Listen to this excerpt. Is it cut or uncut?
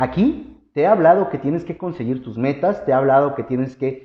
uncut